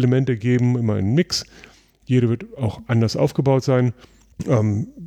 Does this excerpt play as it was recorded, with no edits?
yes; 0 cuts

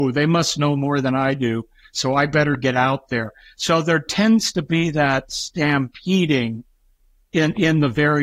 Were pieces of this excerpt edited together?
no; 0 cuts

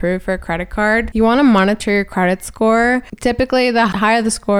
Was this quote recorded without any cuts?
yes; 0 cuts

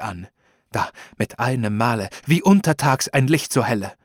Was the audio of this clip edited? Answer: yes; 1 cut; at 2.2 s

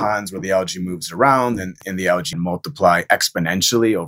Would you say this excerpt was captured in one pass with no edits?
no; 1 cut; at 2.3 s

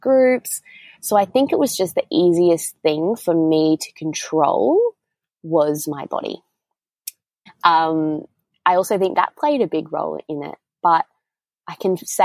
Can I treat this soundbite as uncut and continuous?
no; 1 cut; at 7.5 s

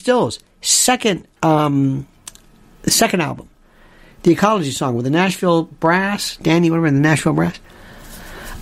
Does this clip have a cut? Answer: no; 0 cuts

